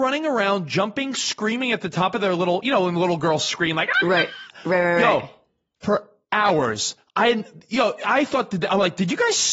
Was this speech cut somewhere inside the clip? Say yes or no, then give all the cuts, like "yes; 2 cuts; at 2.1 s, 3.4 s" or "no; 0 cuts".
no; 0 cuts